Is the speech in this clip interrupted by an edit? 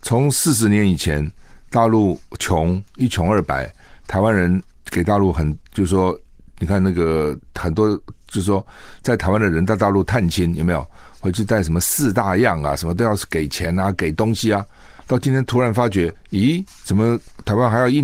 no; 0 cuts

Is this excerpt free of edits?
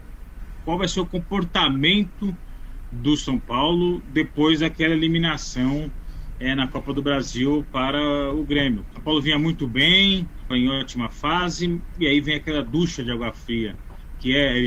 no; 2 cuts; at 8.9 s, 10.5 s

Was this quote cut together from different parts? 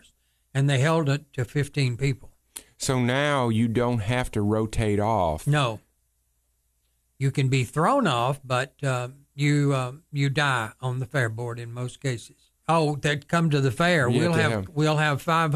yes; 1 cut; at 12.6 s

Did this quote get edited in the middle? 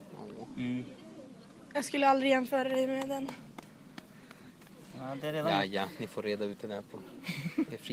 no; 0 cuts

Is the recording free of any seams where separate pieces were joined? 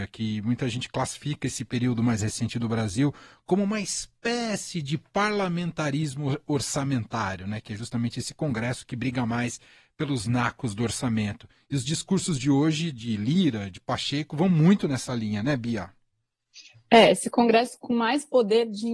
yes; 0 cuts

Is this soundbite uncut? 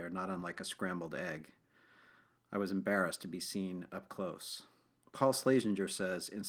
yes; 0 cuts

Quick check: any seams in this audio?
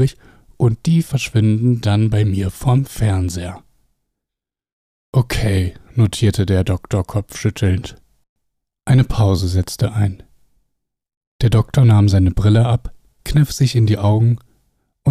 yes; 1 cut; at 13.2 s

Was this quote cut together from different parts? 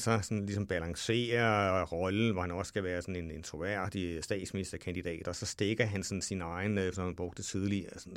yes; 2 cuts; at 5.2 s, 6.9 s

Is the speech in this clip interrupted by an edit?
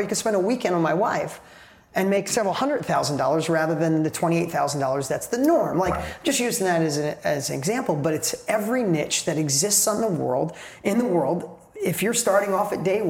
no; 0 cuts

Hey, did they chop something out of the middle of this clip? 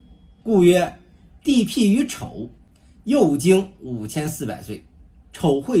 no; 0 cuts

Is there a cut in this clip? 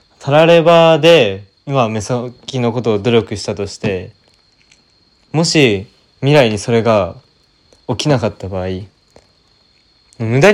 no; 0 cuts

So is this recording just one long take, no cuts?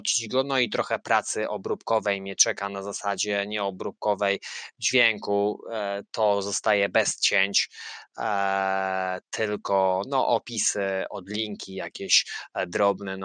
yes; 0 cuts

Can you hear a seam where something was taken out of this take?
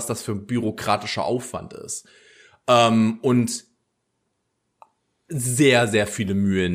no; 0 cuts

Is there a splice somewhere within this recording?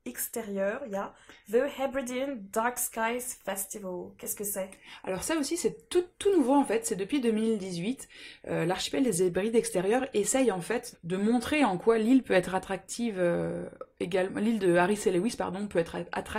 yes; 1 cut; at 10.9 s

